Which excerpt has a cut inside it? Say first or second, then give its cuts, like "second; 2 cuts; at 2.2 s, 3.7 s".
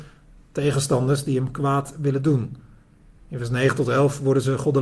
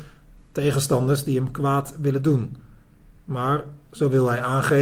first; 1 cut; at 3.2 s